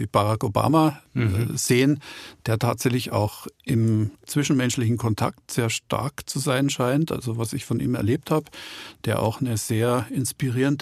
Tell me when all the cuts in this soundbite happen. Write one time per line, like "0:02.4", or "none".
none